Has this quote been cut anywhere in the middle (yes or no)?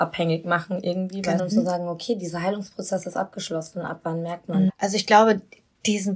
yes